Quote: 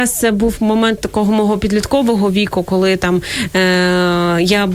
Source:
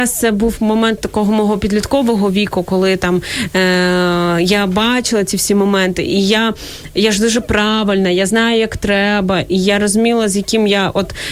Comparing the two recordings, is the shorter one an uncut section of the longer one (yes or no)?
yes